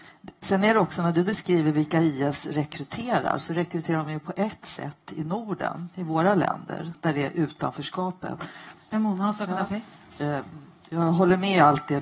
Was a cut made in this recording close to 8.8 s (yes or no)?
yes